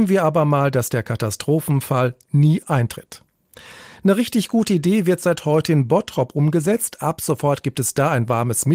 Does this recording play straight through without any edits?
yes; 0 cuts

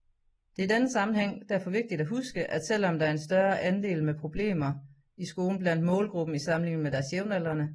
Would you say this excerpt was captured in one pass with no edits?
yes; 0 cuts

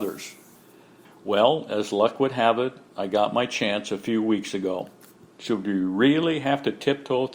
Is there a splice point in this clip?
yes; 2 cuts; at 1.0 s, 5.3 s

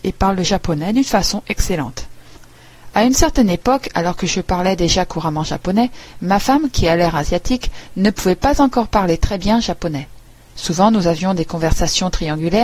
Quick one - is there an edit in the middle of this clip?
no; 0 cuts

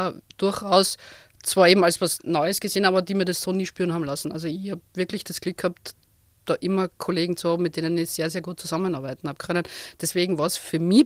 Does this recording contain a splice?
no; 0 cuts

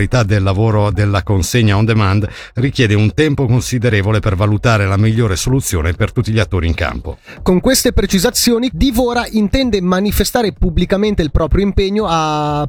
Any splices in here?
yes; 1 cut; at 8.7 s

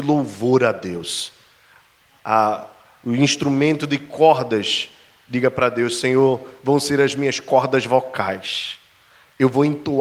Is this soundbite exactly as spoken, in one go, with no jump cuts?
yes; 0 cuts

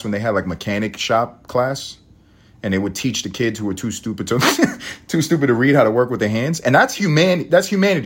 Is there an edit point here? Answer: no; 0 cuts

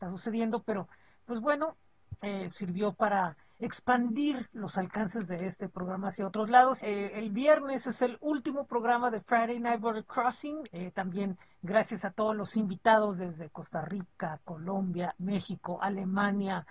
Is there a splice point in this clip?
yes; 3 cuts; at 6.8 s, 10.6 s, 15.1 s

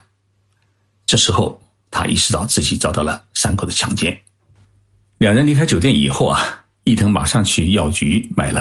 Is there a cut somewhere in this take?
no; 0 cuts

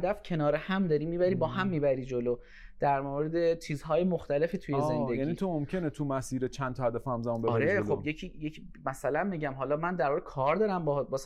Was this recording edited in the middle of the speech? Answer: no; 0 cuts

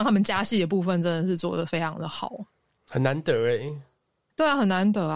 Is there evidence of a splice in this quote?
no; 0 cuts

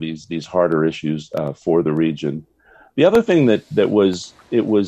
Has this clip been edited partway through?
no; 0 cuts

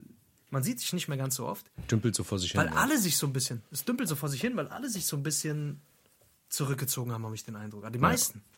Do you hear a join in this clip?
no; 0 cuts

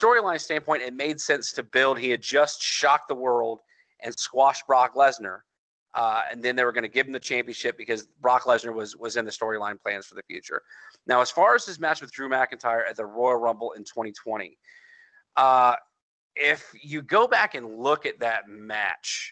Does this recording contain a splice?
no; 0 cuts

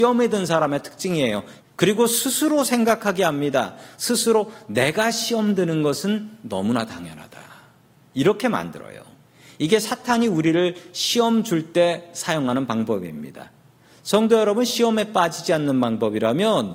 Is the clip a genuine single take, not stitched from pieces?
no; 1 cut; at 1.6 s

